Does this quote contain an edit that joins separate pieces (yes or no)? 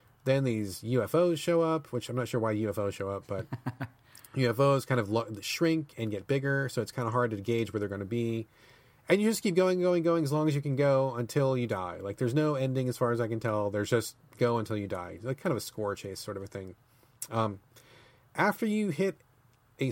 no